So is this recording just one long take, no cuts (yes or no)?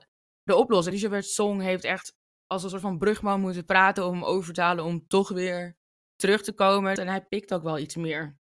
no